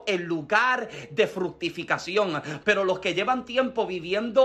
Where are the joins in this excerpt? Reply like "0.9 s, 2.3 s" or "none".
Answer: 2.6 s